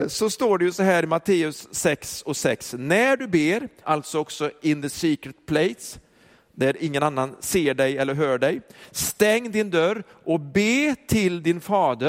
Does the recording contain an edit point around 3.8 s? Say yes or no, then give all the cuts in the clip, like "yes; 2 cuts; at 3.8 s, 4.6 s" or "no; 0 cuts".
yes; 1 cut; at 3.8 s